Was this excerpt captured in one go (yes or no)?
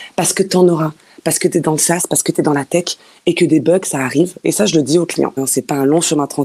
no